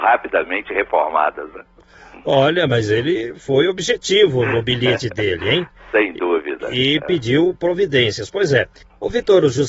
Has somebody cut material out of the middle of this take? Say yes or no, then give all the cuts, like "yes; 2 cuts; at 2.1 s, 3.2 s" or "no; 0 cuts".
no; 0 cuts